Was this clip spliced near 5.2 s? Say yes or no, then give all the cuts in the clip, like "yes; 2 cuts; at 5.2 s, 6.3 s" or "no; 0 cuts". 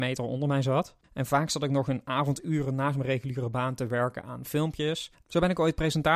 yes; 2 cuts; at 1.0 s, 5.2 s